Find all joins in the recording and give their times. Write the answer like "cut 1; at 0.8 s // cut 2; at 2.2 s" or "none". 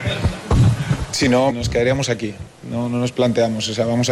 cut 1; at 1.5 s